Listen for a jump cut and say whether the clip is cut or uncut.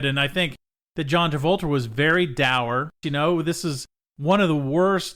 cut